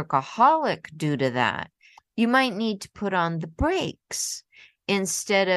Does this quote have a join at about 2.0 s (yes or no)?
yes